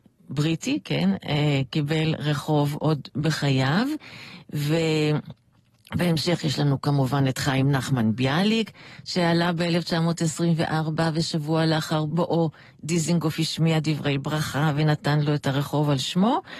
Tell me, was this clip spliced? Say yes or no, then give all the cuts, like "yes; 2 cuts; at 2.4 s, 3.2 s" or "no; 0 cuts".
no; 0 cuts